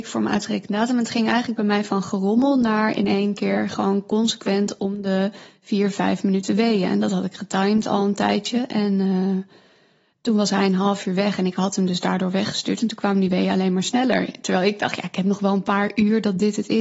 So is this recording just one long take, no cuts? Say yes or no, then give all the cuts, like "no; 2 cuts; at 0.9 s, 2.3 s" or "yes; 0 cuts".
yes; 0 cuts